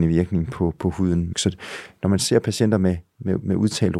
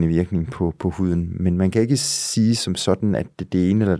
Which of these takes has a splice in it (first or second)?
first